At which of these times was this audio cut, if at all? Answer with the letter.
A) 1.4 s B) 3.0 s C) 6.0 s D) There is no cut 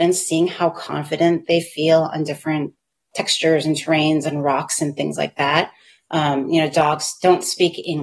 C